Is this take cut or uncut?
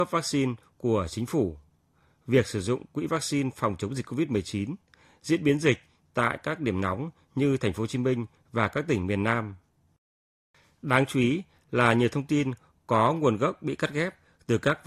uncut